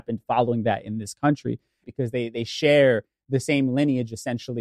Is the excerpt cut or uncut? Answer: cut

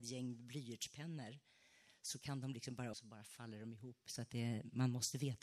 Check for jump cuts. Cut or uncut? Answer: cut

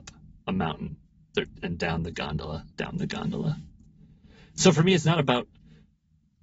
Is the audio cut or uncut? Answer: cut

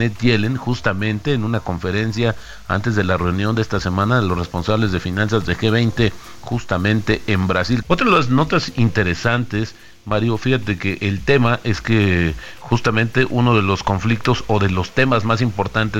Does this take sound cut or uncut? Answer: cut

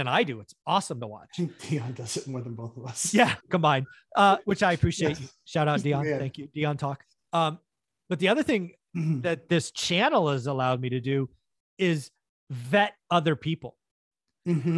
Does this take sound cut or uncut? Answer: uncut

